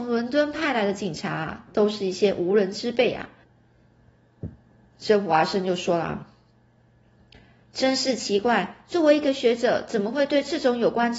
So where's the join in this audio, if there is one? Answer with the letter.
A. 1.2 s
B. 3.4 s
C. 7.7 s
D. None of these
B